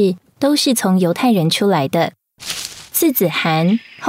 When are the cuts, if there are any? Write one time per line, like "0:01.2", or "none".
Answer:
0:02.9